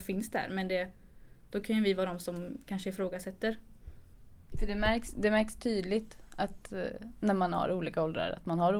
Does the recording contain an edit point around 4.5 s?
yes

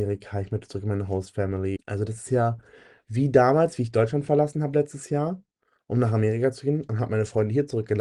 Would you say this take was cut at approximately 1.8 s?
yes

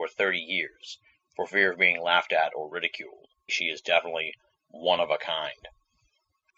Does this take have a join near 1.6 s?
no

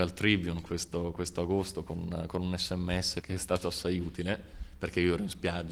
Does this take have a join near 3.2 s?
yes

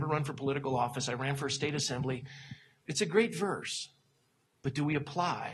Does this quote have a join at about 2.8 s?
yes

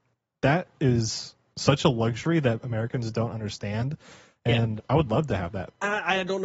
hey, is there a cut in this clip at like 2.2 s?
no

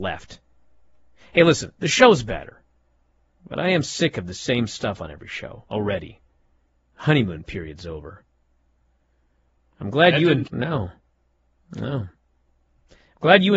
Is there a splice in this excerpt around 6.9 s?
no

